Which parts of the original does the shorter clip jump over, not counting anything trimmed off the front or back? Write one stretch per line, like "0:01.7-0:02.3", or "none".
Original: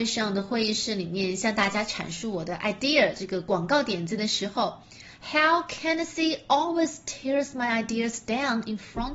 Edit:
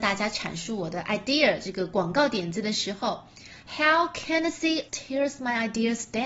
0:06.4-0:07.0